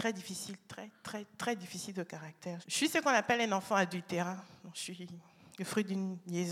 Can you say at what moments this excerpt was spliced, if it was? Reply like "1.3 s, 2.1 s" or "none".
2.6 s